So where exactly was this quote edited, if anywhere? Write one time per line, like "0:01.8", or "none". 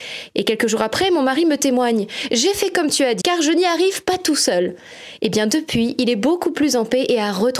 0:03.2